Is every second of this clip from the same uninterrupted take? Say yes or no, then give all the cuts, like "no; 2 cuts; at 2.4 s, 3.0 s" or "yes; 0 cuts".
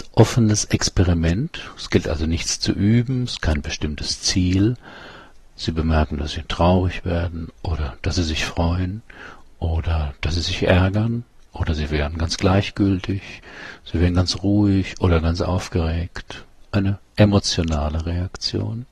no; 1 cut; at 5.5 s